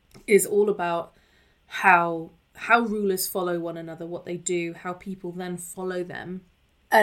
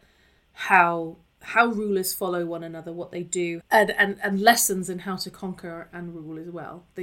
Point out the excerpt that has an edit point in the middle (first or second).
second